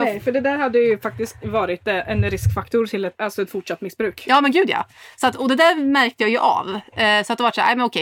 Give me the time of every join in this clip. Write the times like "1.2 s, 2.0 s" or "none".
3.1 s